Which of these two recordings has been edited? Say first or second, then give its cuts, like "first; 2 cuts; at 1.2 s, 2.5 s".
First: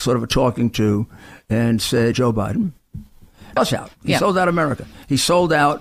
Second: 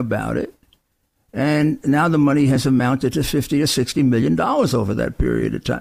first; 2 cuts; at 2.1 s, 3.6 s